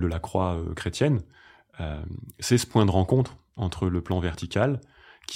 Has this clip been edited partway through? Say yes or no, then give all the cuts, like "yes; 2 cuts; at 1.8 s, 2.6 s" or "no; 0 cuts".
no; 0 cuts